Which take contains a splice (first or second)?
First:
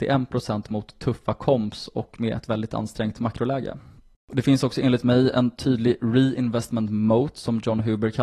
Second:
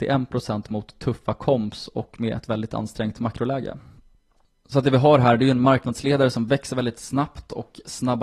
first